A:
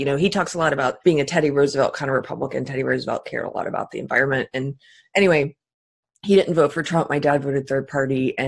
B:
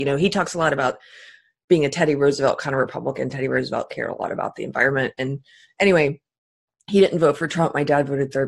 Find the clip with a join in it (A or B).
A